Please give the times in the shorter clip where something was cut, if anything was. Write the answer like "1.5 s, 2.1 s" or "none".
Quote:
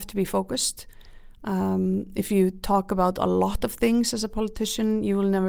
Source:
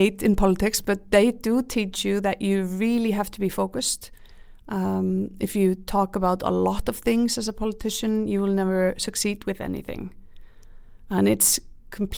none